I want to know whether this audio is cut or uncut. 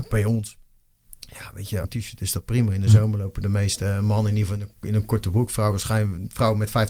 cut